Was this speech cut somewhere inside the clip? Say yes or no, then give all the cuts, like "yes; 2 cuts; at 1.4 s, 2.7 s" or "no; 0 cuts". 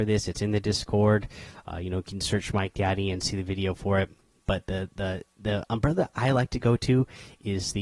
no; 0 cuts